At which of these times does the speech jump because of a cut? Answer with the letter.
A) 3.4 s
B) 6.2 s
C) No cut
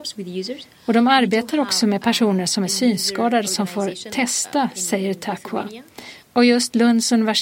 B